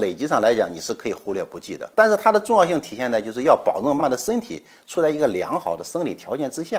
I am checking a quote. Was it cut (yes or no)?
yes